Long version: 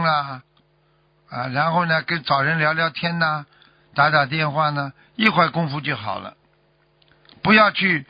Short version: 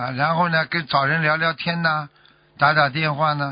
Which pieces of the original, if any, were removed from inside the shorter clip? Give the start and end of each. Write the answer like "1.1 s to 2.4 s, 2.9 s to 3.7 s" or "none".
none